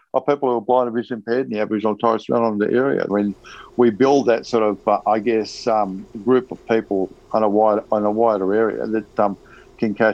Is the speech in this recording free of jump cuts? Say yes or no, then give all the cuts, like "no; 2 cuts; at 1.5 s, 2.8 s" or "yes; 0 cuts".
no; 1 cut; at 3.1 s